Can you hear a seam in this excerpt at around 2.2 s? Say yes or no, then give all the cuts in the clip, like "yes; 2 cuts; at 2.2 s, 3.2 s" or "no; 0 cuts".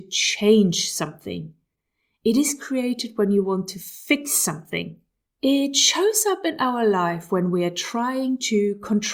no; 1 cut; at 5.3 s